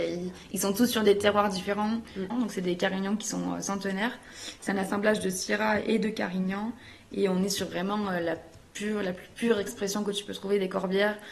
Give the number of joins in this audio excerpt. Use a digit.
1